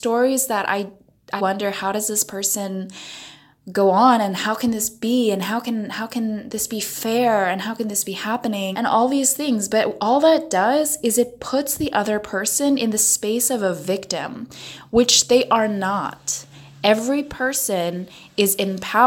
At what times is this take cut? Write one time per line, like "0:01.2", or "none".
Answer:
0:01.4
0:08.7